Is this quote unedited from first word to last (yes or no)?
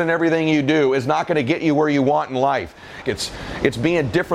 no